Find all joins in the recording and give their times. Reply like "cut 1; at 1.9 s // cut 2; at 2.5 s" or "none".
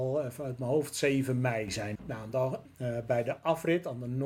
cut 1; at 2.0 s